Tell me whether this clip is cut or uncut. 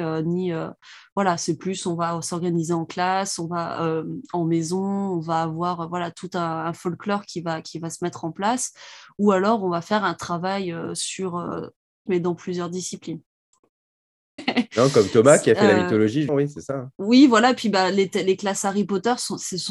cut